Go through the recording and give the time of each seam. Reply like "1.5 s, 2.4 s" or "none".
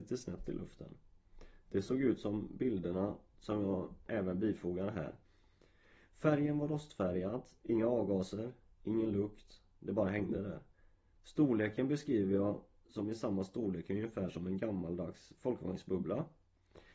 4.1 s, 7.6 s